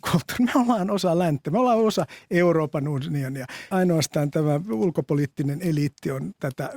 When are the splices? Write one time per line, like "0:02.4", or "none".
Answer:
0:03.7